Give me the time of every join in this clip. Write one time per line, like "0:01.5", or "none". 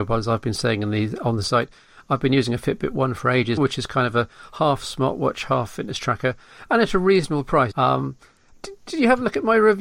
0:03.6
0:07.7